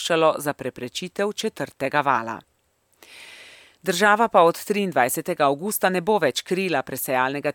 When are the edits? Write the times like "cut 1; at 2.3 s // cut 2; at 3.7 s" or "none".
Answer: none